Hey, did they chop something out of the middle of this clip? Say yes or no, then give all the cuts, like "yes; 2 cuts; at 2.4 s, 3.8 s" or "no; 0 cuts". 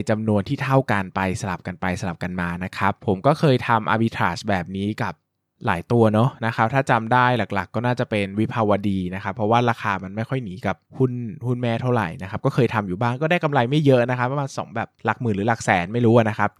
no; 0 cuts